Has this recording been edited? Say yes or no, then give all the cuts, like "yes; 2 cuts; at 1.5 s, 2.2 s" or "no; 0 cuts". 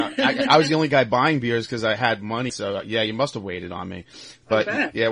yes; 1 cut; at 2.5 s